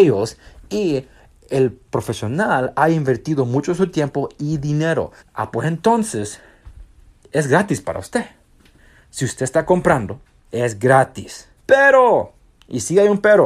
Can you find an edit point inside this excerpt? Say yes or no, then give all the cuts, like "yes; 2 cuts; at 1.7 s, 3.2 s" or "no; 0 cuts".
yes; 3 cuts; at 5.2 s, 10.5 s, 11.6 s